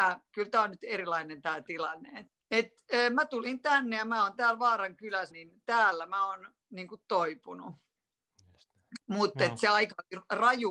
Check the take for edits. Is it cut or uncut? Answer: cut